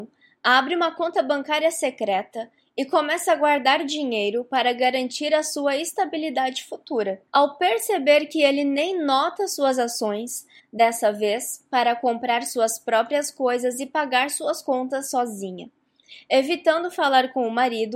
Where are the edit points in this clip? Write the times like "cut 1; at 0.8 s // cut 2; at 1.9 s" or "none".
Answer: cut 1; at 7.3 s // cut 2; at 10.6 s